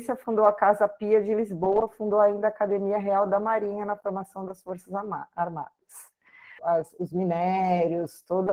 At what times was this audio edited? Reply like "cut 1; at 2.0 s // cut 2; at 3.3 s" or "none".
cut 1; at 6.6 s